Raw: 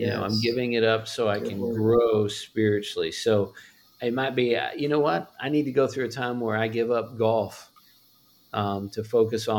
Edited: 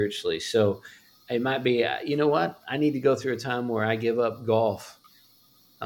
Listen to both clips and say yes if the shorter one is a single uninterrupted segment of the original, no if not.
yes